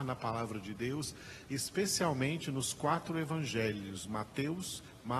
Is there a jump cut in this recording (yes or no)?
no